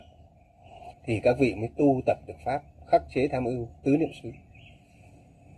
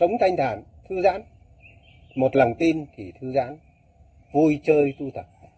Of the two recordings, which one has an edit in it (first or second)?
first